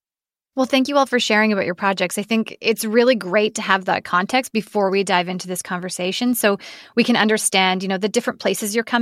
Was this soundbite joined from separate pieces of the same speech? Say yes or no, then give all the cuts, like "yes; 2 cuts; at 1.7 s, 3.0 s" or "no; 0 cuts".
no; 0 cuts